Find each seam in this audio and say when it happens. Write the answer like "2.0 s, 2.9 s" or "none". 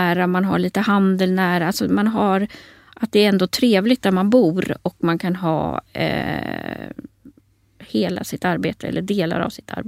none

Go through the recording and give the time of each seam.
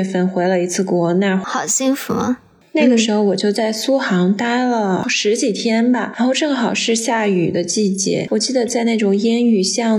none

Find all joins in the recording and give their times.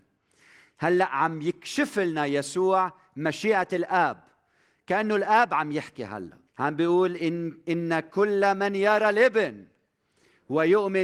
6.5 s

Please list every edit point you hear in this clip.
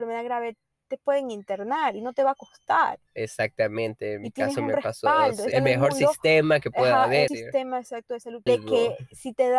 5.5 s, 7.3 s, 8.5 s

